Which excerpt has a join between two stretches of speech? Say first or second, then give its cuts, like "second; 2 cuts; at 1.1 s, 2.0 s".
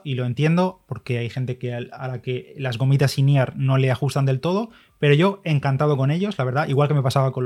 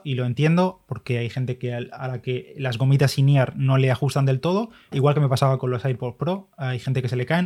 second; 1 cut; at 4.9 s